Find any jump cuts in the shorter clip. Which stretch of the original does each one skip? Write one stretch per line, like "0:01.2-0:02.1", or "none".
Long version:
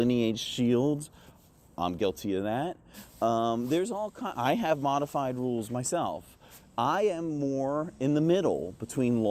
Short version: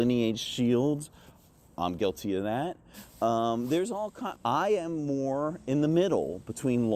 0:04.3-0:06.7